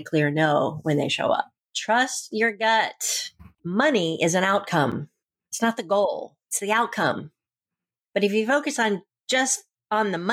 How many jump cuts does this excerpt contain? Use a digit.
0